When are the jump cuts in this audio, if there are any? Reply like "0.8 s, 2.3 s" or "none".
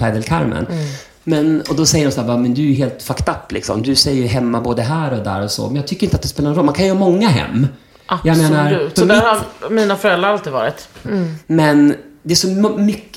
9.0 s, 11.0 s